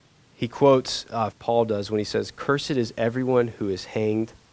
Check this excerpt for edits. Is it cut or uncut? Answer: cut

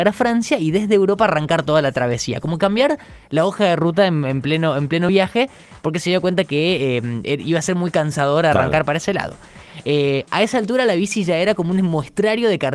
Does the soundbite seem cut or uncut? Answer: uncut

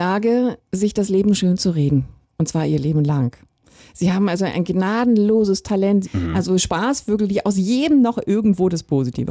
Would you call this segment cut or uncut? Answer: cut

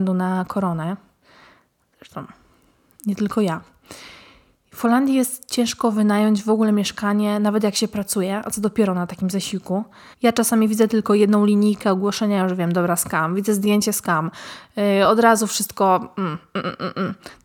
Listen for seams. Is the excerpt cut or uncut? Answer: cut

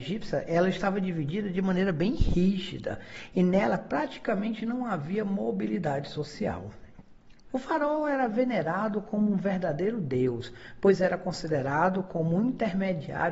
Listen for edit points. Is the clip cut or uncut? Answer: cut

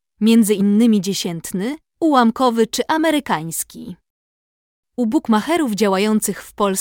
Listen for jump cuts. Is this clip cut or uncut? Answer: uncut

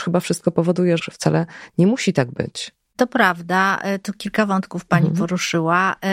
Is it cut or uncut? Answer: cut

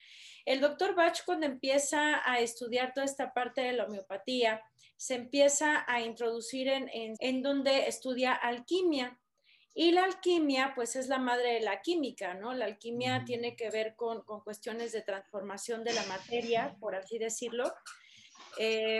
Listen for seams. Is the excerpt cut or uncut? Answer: cut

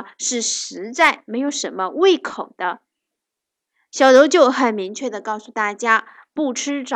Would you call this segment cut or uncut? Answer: uncut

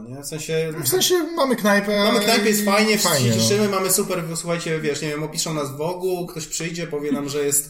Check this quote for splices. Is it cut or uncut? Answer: uncut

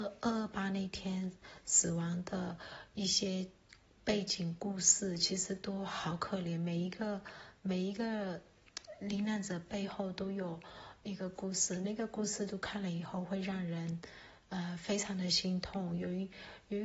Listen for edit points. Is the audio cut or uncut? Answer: uncut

